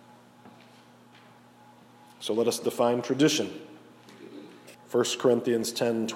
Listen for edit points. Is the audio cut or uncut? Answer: cut